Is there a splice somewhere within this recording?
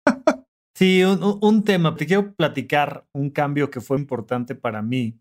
yes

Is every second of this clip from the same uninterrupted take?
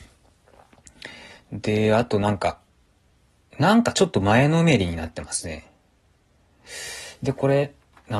yes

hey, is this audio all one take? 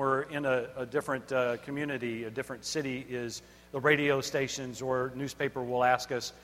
yes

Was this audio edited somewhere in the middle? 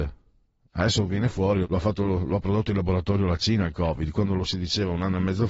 yes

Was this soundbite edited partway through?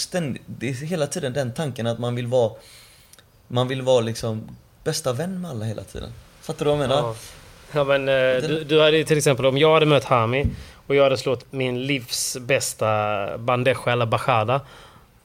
yes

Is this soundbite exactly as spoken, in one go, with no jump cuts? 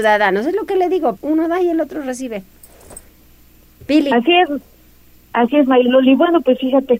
no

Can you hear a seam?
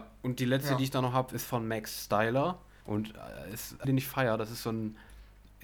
yes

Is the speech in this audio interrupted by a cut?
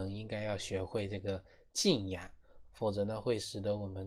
yes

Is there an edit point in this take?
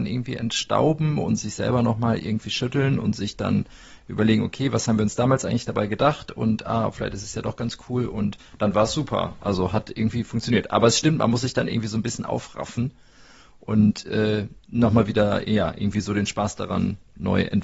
no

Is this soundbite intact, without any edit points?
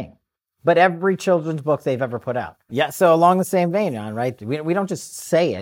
no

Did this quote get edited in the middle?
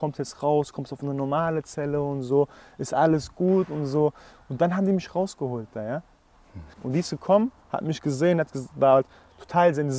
yes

